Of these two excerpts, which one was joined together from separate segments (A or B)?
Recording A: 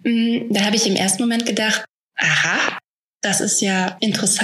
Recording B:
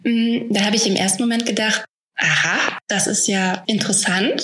B